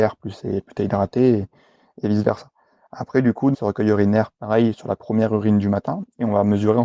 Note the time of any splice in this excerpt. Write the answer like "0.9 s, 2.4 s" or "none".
3.5 s